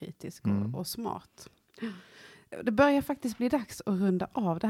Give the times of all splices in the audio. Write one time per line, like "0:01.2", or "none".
none